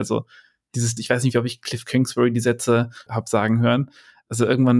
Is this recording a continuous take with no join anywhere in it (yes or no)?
no